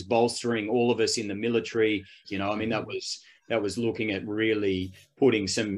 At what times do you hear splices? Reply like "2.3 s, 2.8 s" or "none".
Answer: 2.2 s